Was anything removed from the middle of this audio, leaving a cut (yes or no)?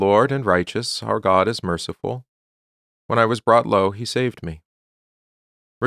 yes